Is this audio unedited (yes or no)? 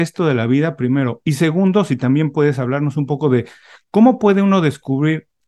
yes